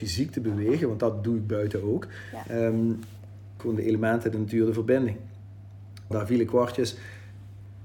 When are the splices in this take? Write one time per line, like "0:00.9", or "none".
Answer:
0:03.6
0:06.1